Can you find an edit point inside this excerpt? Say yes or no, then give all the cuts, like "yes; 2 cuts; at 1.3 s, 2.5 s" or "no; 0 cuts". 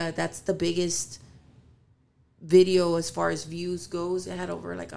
no; 0 cuts